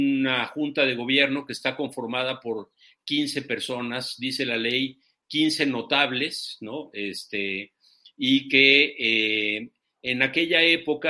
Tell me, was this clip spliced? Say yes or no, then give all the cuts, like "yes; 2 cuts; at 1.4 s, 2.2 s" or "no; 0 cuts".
no; 0 cuts